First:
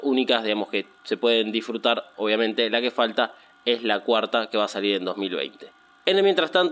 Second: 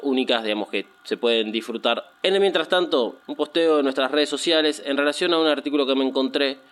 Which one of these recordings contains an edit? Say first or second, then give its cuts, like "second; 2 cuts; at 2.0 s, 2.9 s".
second; 2 cuts; at 2.1 s, 3.2 s